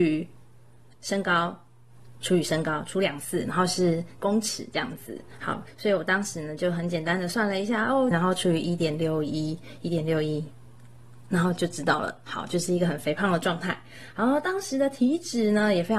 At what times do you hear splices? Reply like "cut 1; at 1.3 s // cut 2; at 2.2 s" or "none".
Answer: cut 1; at 8.1 s